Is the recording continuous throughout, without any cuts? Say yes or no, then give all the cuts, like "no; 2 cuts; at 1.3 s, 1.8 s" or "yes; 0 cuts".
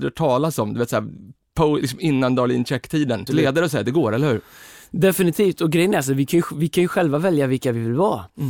no; 1 cut; at 3.3 s